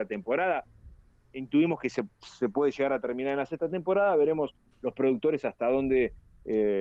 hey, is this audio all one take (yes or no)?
yes